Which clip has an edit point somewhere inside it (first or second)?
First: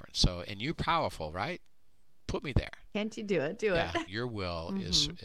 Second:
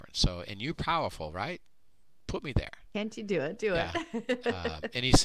first